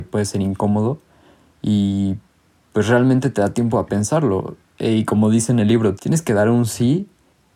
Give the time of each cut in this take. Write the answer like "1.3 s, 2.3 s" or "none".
6.0 s